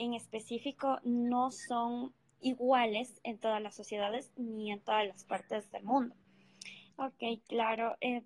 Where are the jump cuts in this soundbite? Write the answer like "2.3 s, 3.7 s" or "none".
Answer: 2.4 s, 6.9 s